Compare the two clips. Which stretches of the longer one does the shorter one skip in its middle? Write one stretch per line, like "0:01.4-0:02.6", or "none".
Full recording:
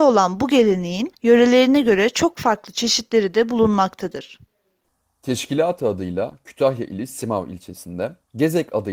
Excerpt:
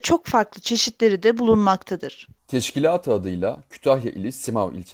0:04.5-0:05.1